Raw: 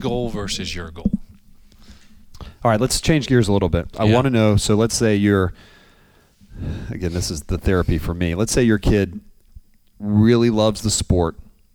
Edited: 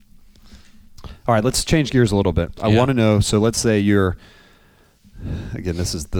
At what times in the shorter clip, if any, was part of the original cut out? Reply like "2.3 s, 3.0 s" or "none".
none